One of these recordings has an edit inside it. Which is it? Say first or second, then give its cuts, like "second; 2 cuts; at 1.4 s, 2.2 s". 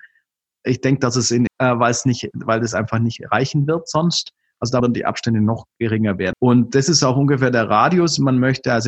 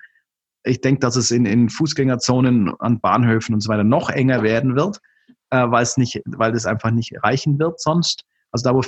first; 3 cuts; at 1.5 s, 4.8 s, 6.3 s